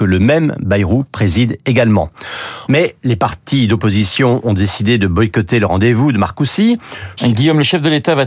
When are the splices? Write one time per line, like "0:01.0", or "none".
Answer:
0:02.7
0:07.2